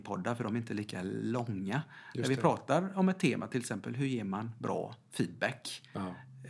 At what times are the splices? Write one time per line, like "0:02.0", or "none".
none